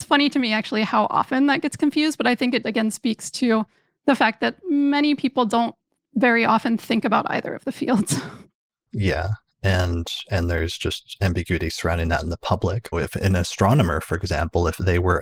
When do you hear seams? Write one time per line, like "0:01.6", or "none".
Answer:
0:02.6
0:12.9